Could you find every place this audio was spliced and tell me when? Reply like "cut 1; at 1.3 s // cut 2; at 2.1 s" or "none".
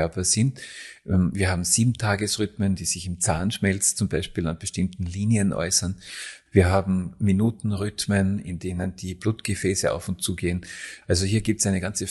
cut 1; at 6.5 s // cut 2; at 11.0 s